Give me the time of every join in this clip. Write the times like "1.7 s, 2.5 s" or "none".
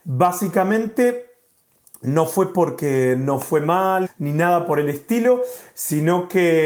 4.1 s